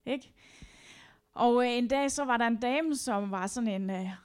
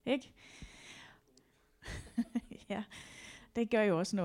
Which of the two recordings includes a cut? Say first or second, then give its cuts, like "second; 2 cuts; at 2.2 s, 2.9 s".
second; 1 cut; at 1.2 s